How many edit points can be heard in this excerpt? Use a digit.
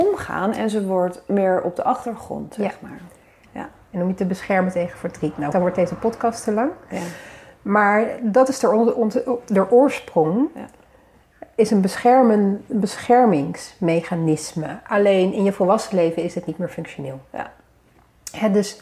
2